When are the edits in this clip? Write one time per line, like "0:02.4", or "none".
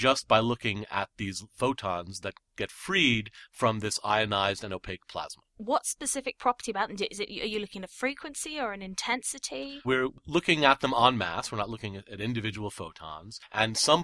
0:05.5
0:09.8